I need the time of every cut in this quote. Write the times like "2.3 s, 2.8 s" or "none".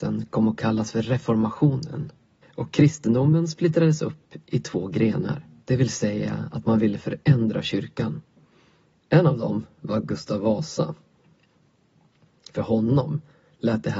2.4 s, 5.6 s, 8.9 s